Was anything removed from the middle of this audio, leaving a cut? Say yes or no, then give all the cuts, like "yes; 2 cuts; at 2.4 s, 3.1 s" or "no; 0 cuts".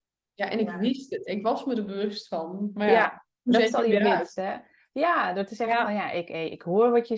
no; 0 cuts